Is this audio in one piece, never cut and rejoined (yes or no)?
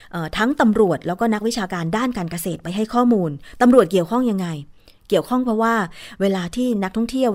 yes